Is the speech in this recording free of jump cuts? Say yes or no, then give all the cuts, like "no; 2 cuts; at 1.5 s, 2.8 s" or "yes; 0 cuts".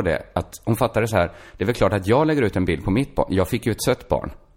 yes; 0 cuts